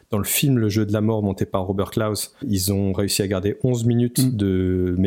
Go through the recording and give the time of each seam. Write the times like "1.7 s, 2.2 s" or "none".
2.4 s